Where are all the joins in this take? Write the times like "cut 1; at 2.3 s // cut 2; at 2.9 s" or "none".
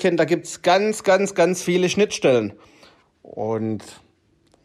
cut 1; at 3.0 s